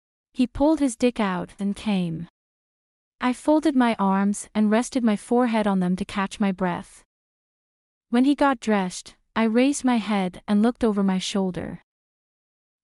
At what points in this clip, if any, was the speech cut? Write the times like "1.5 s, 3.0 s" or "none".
1.6 s

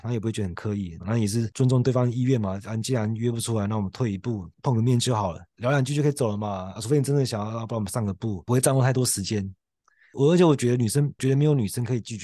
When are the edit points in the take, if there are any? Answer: 1.0 s

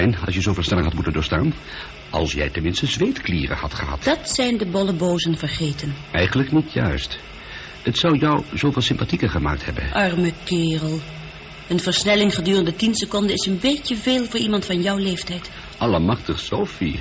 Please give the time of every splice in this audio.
none

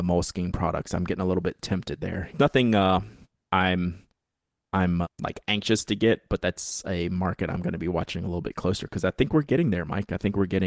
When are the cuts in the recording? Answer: 2.3 s, 5.0 s

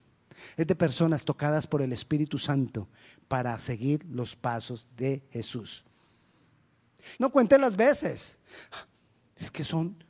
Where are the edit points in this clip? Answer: 7.2 s

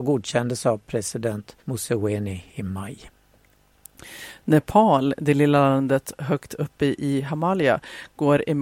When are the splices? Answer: 1.6 s

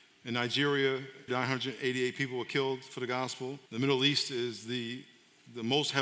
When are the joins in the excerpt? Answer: 1.3 s, 3.7 s

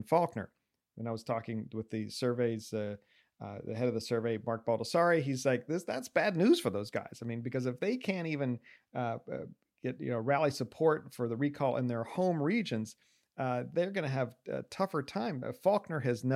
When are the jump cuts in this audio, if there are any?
none

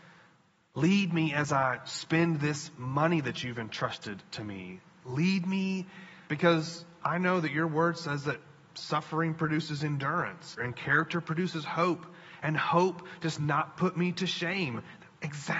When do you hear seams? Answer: 6.3 s, 10.6 s

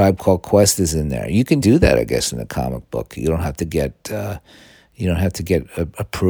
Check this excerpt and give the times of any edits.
1.6 s

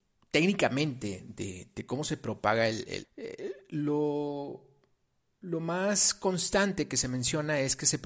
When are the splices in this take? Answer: 3.0 s

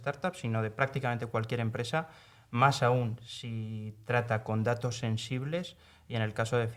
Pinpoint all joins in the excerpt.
none

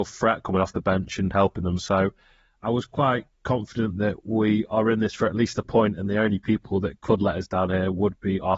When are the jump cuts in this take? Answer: none

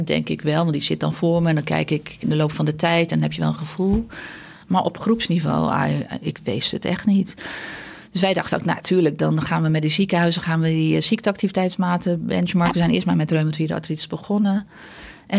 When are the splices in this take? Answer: none

